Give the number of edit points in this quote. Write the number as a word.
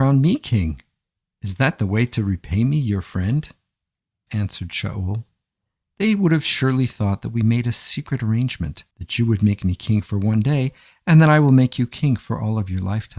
two